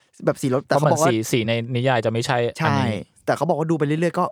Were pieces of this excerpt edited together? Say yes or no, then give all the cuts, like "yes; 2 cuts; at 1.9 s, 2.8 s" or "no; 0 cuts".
no; 0 cuts